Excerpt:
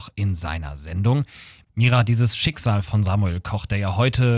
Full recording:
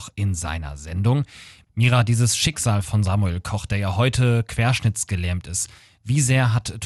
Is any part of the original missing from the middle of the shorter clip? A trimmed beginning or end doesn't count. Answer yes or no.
no